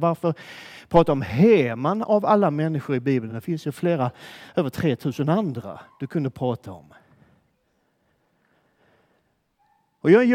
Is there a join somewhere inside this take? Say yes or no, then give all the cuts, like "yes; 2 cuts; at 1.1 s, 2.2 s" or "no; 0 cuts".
no; 0 cuts